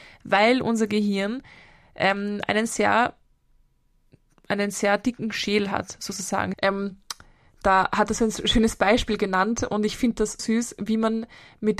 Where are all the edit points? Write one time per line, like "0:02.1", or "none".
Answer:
0:06.5
0:10.4